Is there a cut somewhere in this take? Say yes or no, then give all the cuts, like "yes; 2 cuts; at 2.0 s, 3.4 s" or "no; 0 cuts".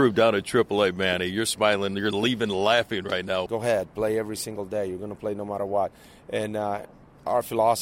yes; 1 cut; at 3.5 s